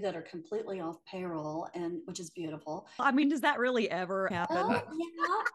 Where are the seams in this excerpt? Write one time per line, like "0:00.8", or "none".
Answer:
0:03.0
0:04.3